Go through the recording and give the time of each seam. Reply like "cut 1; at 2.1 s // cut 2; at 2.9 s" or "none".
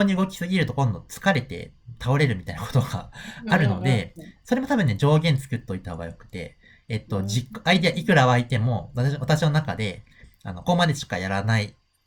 cut 1; at 10.6 s